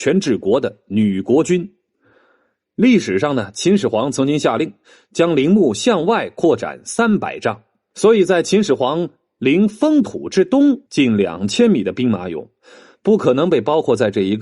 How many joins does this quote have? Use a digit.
2